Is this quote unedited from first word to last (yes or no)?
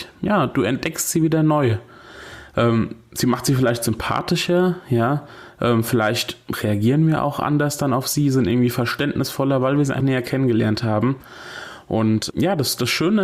no